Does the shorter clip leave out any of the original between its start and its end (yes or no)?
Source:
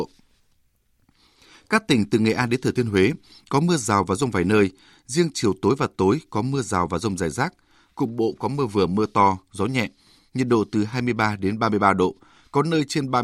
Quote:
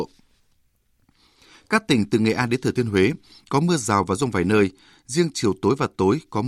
no